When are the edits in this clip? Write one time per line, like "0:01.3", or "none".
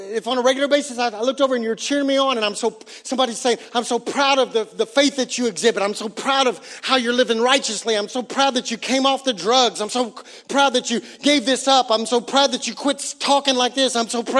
none